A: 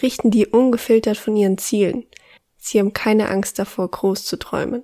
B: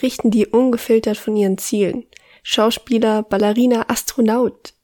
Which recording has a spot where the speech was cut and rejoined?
A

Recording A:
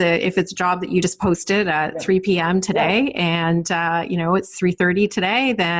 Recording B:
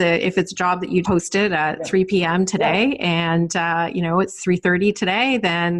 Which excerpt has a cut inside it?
B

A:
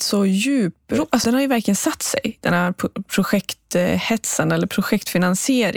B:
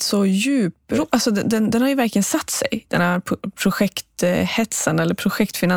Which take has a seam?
A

